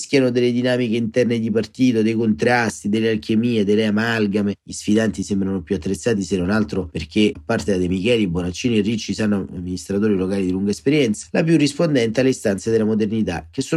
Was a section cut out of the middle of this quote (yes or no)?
yes